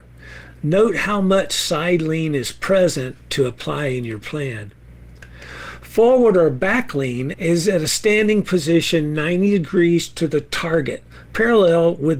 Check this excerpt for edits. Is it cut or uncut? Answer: cut